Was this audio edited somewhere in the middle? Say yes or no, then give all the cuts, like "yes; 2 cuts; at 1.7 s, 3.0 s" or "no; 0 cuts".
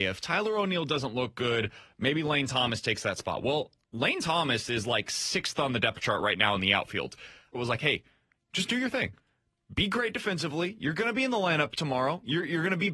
yes; 1 cut; at 7.5 s